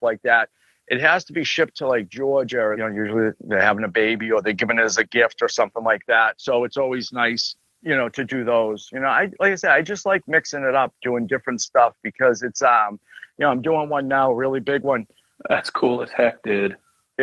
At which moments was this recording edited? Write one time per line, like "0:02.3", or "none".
0:02.7
0:15.3